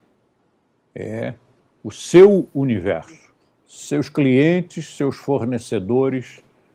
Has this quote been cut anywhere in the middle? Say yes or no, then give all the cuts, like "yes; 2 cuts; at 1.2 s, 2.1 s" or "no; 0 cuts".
no; 0 cuts